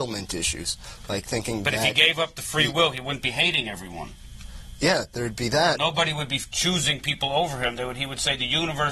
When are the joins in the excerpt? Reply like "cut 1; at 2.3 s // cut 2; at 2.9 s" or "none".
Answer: none